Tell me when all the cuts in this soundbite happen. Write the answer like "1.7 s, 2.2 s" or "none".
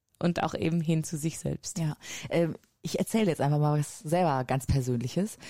none